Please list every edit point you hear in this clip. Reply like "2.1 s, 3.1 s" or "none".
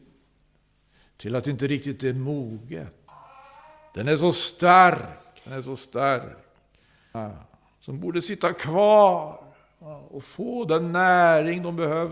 none